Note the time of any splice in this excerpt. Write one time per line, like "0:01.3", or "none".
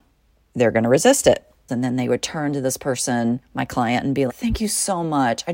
0:01.7
0:04.3